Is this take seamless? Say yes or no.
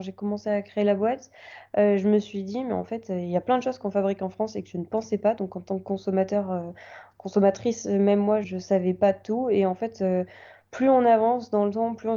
no